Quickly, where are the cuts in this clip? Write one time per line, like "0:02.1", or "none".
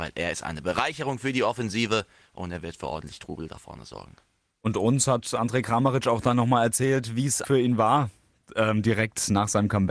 0:07.4